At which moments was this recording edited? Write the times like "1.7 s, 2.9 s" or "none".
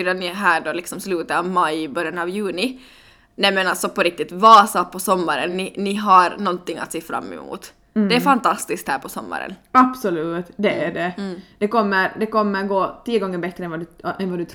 none